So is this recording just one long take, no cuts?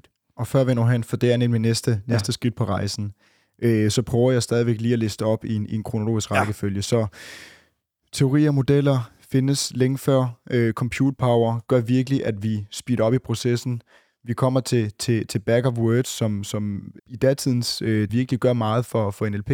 no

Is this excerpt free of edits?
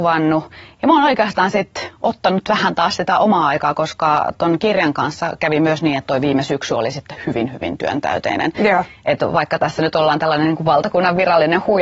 yes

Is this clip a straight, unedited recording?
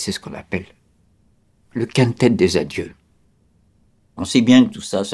no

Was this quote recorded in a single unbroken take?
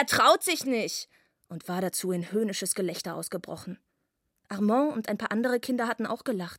yes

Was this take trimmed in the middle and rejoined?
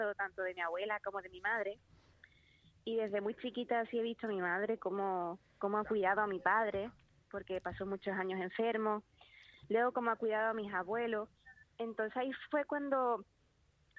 yes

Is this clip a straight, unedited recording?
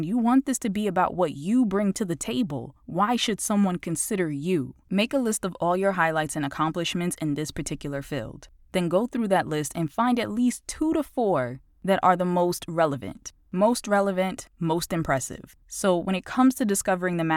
no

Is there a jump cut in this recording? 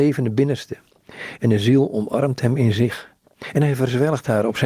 no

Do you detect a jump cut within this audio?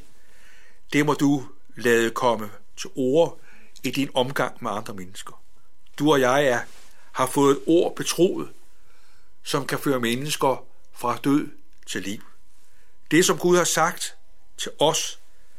no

